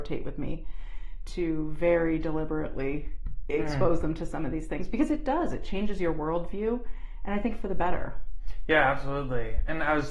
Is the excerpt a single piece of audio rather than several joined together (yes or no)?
no